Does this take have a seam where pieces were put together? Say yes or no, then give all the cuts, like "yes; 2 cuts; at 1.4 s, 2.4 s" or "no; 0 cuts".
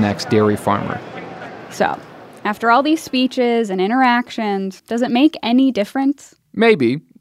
yes; 1 cut; at 4.8 s